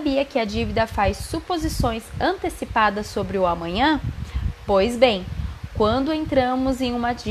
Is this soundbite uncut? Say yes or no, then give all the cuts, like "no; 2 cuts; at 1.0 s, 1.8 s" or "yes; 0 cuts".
yes; 0 cuts